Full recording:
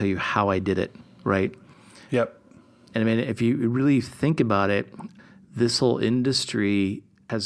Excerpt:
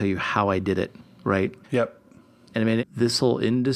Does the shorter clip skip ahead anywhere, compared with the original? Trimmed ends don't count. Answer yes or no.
yes